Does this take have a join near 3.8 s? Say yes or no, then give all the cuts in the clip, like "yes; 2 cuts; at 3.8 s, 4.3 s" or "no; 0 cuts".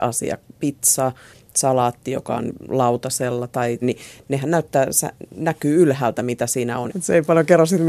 yes; 2 cuts; at 3.8 s, 6.9 s